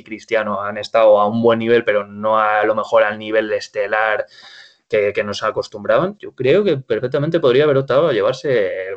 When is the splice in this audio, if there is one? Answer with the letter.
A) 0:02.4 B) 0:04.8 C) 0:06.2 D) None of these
C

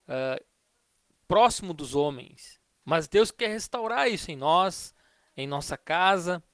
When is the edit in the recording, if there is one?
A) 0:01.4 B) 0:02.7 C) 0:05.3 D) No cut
B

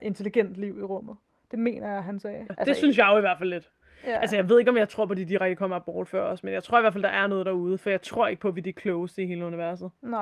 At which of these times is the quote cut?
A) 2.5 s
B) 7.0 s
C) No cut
A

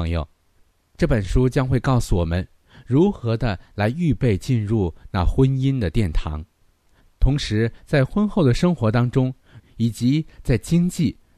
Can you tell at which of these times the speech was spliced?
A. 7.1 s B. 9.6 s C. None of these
B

